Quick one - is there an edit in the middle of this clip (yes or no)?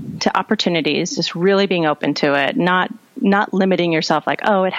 no